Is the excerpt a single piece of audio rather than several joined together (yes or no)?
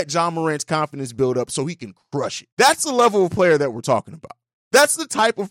yes